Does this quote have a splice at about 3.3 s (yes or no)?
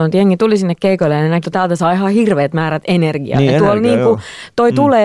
no